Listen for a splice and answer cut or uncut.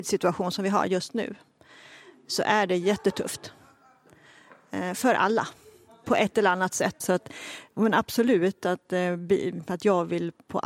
cut